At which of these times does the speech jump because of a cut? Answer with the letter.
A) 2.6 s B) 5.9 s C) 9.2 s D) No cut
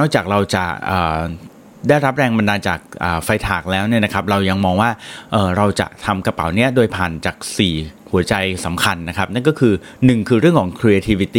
A